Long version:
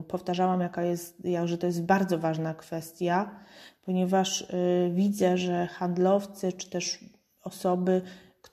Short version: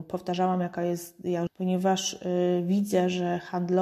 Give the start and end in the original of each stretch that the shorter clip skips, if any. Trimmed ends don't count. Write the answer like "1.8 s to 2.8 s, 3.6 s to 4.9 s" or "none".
1.5 s to 3.7 s